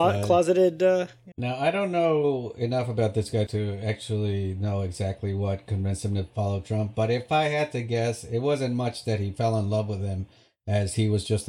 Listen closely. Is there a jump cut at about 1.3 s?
yes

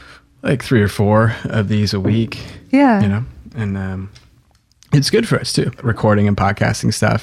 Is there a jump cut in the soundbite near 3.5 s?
no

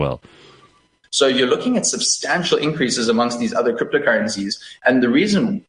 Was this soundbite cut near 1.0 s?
yes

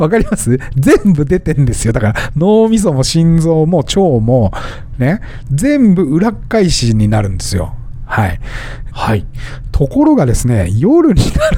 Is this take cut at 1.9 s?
no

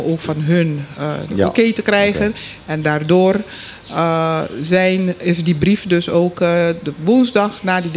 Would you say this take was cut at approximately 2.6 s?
no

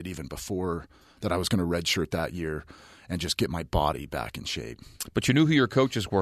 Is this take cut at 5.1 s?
no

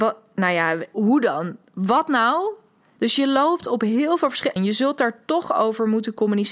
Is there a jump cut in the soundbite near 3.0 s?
yes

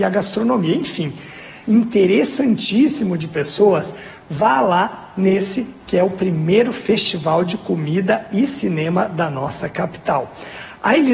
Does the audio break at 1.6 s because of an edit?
yes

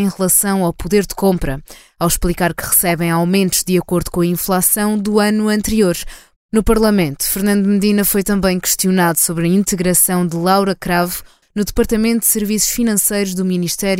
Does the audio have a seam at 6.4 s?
yes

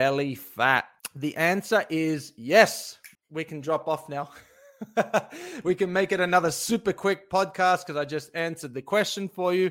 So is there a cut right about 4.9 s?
no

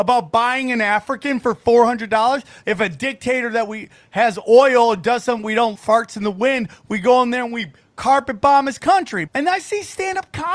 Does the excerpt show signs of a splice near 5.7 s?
yes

